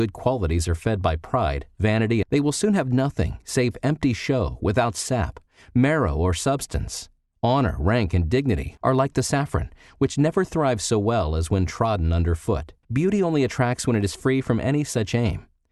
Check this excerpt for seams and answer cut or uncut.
cut